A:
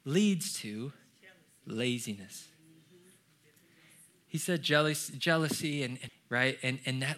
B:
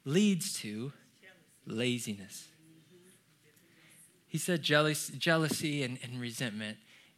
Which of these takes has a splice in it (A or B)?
A